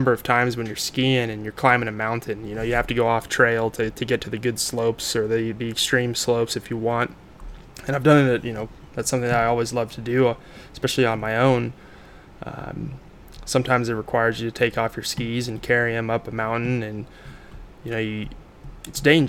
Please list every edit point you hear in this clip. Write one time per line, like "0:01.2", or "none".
none